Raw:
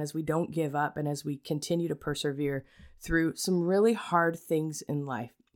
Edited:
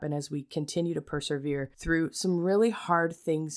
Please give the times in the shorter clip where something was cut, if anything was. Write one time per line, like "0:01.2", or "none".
0:01.7